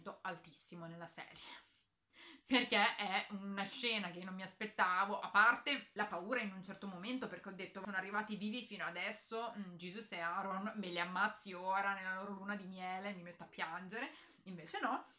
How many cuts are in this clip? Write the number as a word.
zero